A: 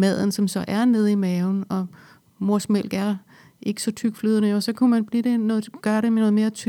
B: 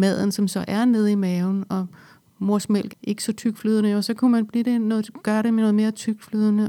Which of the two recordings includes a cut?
B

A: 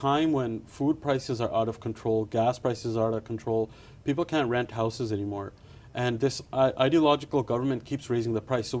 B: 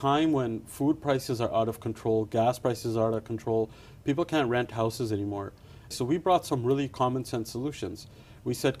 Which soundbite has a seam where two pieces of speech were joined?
B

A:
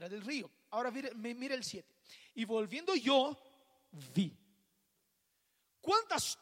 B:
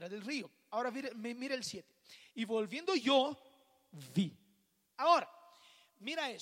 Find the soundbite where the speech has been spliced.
B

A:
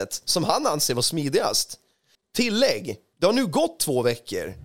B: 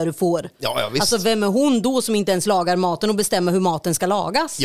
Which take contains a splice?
A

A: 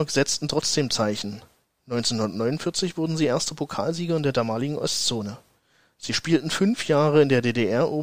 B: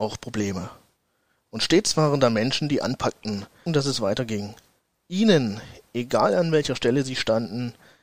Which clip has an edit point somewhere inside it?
B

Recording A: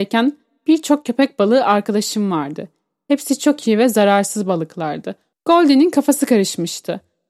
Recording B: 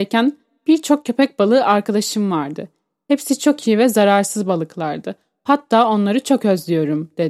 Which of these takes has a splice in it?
A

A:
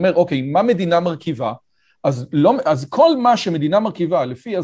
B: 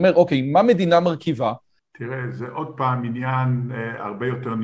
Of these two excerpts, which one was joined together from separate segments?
B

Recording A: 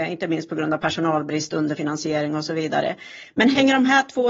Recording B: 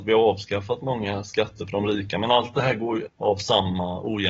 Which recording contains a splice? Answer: B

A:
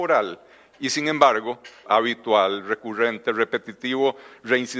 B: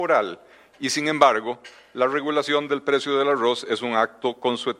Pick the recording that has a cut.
A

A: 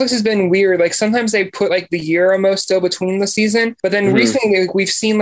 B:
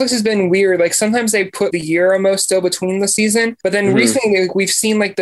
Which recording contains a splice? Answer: B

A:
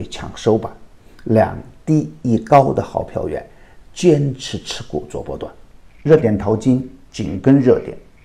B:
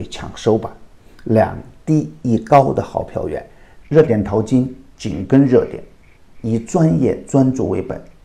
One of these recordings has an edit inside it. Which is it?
B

